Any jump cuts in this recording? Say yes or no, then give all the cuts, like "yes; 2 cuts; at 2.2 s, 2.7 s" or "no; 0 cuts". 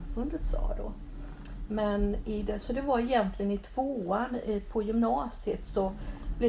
no; 0 cuts